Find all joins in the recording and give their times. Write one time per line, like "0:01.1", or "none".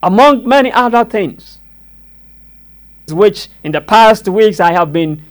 0:03.1

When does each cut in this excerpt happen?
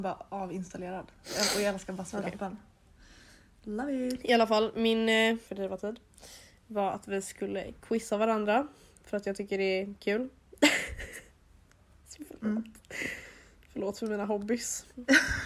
0:05.5

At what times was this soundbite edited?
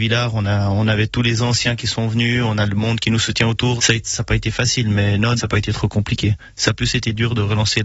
0:03.8
0:05.4

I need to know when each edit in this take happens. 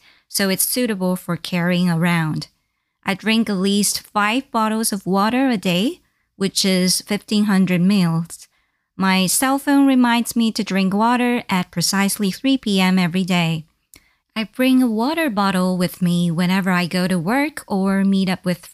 0:14.2

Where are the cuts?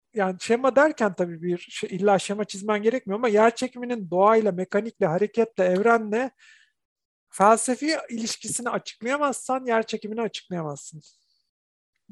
none

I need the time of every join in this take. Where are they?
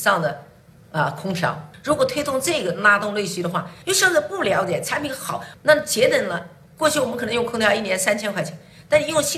none

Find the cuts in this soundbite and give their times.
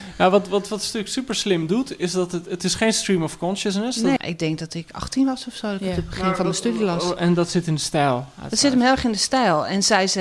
0:04.2

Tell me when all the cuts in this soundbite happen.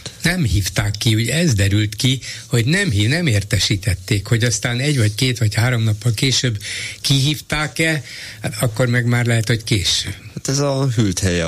none

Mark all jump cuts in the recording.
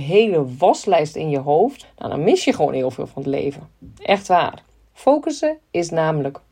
0:01.8

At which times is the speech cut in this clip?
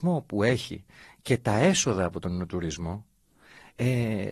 none

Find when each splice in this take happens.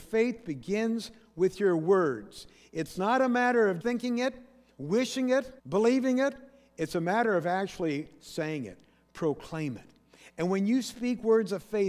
0:03.8
0:05.6

